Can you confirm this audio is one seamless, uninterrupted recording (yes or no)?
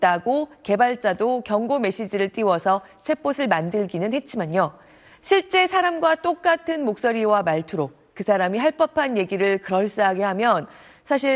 yes